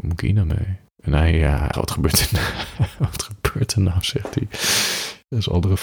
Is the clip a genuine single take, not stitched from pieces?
no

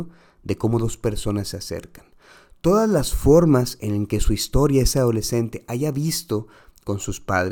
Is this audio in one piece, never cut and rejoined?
yes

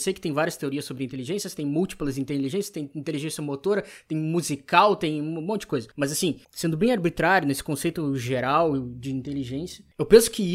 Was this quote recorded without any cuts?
yes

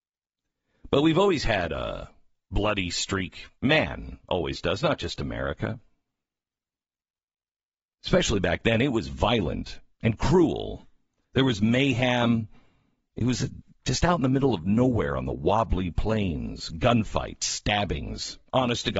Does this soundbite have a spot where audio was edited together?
no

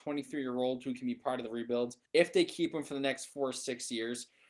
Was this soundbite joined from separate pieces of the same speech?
yes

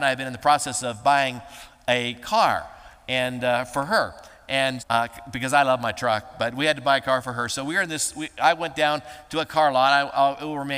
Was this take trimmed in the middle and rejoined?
yes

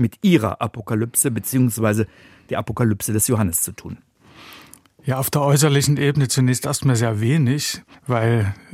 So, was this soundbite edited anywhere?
no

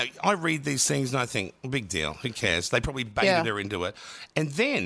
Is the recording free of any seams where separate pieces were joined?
yes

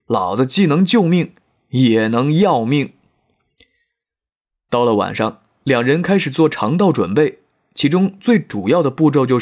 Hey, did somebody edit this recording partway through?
no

